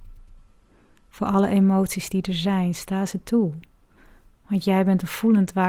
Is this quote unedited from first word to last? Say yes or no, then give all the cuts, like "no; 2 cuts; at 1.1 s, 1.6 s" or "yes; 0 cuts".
yes; 0 cuts